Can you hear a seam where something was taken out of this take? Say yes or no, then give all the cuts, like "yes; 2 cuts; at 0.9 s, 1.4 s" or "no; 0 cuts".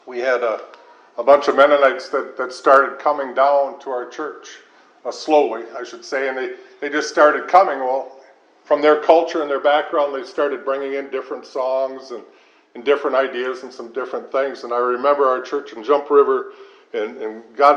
no; 0 cuts